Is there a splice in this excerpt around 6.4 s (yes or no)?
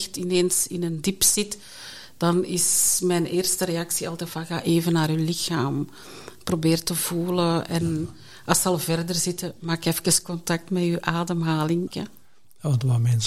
no